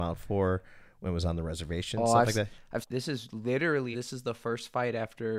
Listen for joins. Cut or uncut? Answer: cut